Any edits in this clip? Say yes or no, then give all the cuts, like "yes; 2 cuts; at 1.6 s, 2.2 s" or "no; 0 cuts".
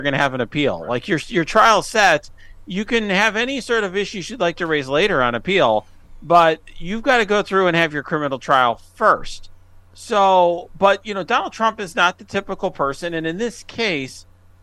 no; 0 cuts